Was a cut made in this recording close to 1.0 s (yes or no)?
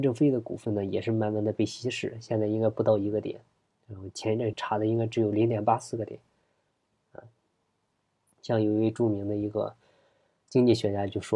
no